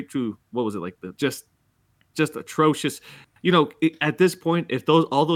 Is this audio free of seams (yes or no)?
no